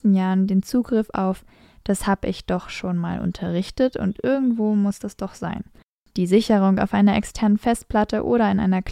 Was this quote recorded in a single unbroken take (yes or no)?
yes